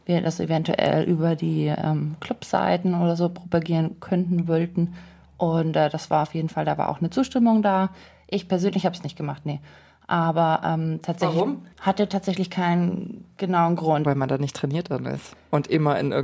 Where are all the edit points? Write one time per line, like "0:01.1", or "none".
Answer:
0:11.7
0:14.0